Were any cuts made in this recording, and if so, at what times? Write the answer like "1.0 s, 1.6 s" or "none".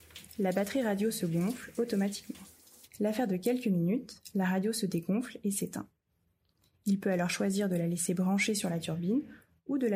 2.8 s